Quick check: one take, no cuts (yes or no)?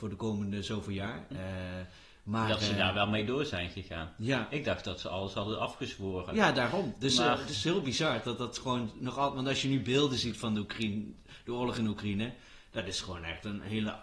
no